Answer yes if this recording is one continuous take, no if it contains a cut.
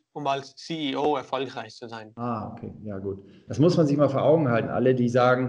no